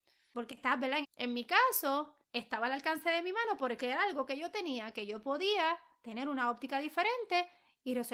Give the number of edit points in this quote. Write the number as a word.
two